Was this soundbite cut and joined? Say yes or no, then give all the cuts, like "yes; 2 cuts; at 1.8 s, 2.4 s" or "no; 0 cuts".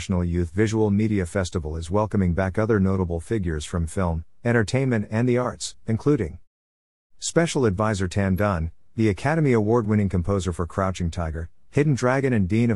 no; 0 cuts